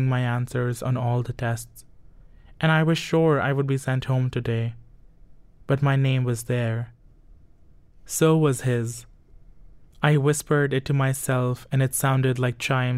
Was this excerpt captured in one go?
yes; 0 cuts

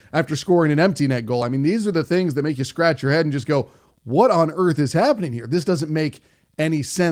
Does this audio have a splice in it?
no; 0 cuts

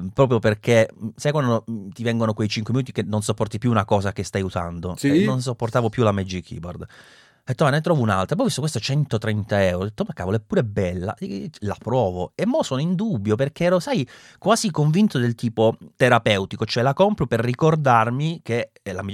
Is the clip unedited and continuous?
yes; 0 cuts

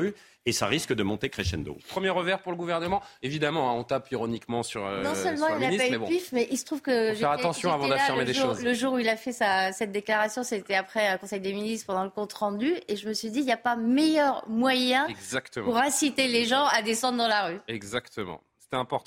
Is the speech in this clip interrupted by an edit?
yes; 1 cut; at 1.8 s

